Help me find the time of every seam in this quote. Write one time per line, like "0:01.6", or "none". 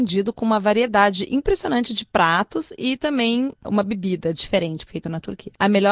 0:04.9